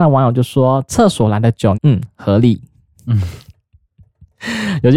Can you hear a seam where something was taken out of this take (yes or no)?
yes